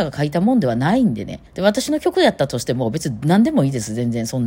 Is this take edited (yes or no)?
yes